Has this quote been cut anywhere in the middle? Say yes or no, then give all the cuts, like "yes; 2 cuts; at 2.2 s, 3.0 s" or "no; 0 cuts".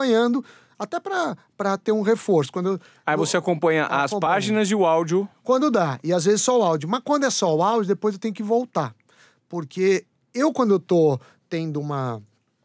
no; 0 cuts